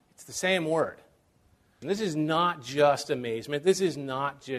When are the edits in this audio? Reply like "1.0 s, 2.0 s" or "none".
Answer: 1.8 s